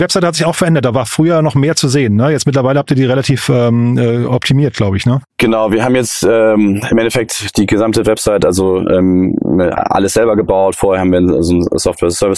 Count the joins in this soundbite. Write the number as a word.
zero